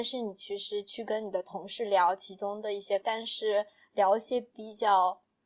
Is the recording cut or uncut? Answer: cut